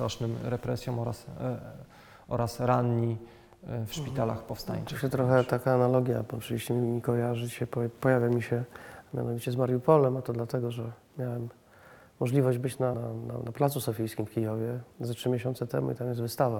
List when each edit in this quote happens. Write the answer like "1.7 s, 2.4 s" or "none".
12.9 s, 14.9 s